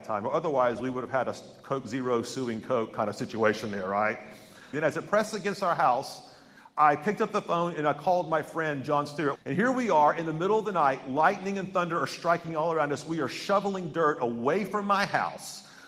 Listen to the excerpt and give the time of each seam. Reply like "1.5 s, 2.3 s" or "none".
4.7 s, 9.3 s

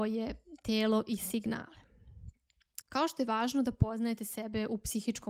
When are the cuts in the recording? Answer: 2.8 s

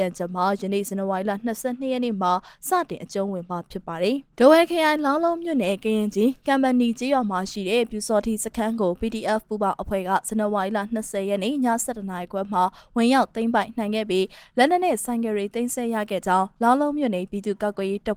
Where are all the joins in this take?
4.3 s

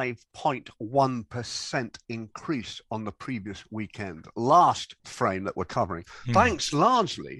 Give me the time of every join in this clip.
5.0 s

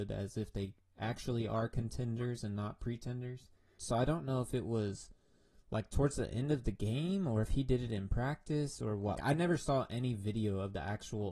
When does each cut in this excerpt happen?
3.8 s, 9.2 s

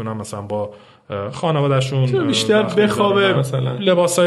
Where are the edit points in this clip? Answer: 3.3 s

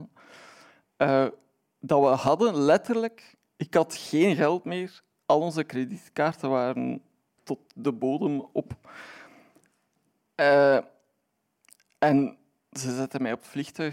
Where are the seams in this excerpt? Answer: 7.4 s

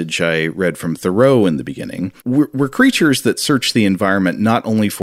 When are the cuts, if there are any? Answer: 2.2 s

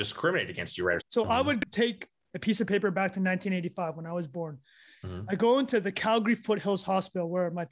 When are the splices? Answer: 1.0 s

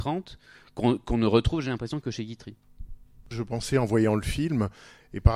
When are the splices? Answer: 3.3 s

